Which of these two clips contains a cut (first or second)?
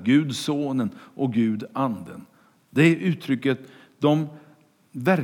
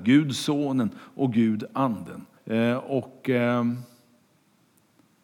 second